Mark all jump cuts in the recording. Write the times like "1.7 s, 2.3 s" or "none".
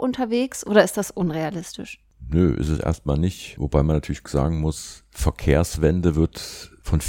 none